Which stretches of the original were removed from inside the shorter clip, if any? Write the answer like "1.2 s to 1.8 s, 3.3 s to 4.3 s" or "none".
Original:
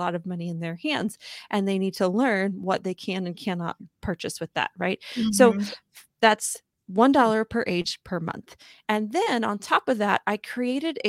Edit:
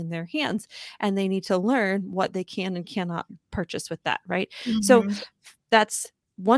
none